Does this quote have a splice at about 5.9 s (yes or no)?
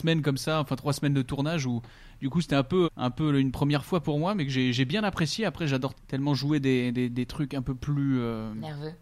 yes